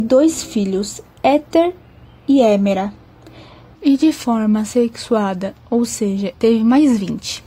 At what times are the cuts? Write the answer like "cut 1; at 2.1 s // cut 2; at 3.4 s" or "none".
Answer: cut 1; at 6.3 s